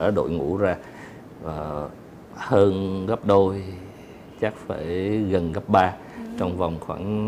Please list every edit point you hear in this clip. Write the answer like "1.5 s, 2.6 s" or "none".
none